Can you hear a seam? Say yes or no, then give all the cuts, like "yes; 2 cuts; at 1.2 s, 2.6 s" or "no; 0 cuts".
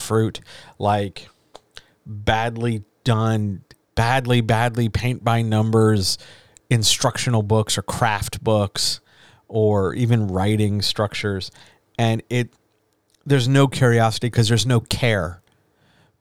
yes; 1 cut; at 3.8 s